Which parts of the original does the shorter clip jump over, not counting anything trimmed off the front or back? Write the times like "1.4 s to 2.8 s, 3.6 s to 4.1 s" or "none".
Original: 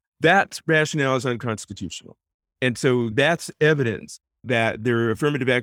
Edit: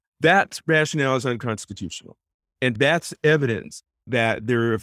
2.8 s to 3.1 s